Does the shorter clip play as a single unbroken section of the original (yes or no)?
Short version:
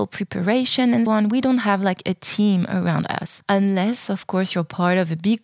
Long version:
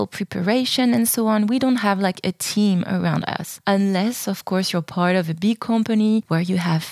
no